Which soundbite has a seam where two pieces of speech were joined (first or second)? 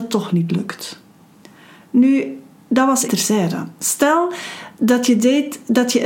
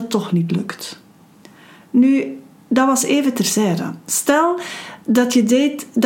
first